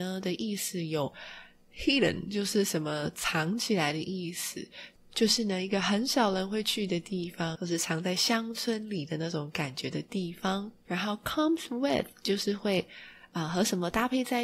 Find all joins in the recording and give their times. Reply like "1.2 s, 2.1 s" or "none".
7.5 s, 10.8 s

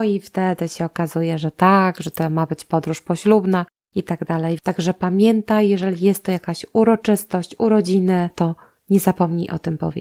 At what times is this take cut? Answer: 4.6 s, 8.3 s

